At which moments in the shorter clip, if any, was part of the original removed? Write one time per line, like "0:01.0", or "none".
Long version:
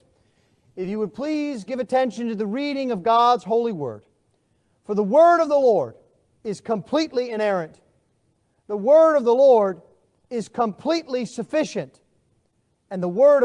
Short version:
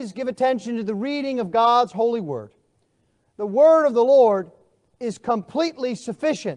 0:03.2